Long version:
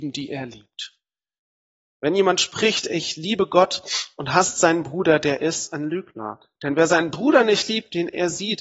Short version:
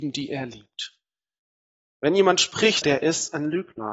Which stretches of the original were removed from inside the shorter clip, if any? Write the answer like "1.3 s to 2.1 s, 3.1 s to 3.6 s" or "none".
2.8 s to 5.2 s